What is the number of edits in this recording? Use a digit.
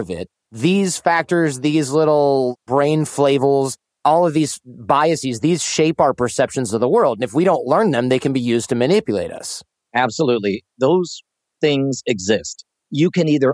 0